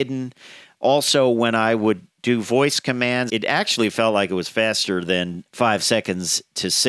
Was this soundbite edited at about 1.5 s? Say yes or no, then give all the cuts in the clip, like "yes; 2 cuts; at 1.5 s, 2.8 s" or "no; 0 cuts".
no; 2 cuts; at 3.3 s, 5.5 s